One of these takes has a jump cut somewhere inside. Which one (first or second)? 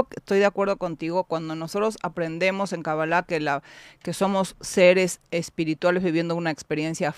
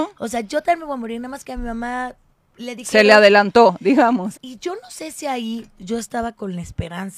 second